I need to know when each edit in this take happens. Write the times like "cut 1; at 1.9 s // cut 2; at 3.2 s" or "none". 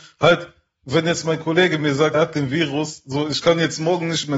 cut 1; at 2.1 s